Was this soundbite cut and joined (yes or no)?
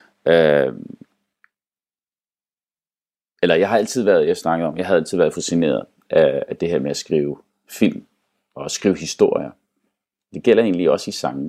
no